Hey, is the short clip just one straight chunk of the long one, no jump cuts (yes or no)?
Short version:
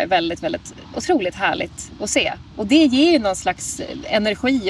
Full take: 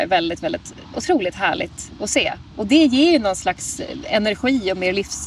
yes